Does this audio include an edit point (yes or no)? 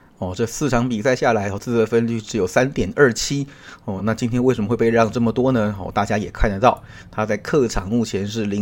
yes